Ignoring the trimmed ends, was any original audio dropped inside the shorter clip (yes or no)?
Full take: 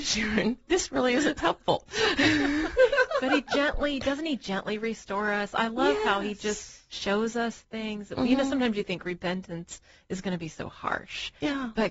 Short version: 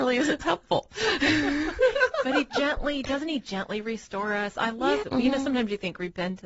yes